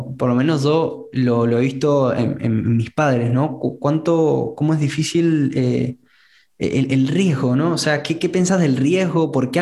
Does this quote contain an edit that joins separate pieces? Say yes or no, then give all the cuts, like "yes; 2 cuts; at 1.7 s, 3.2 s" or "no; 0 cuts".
no; 0 cuts